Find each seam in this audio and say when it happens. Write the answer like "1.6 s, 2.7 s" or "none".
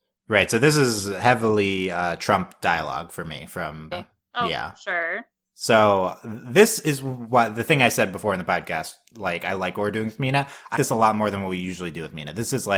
3.9 s, 10.8 s